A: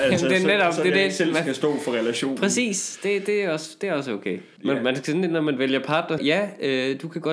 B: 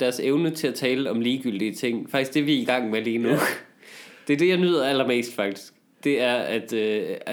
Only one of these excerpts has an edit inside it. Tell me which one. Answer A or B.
A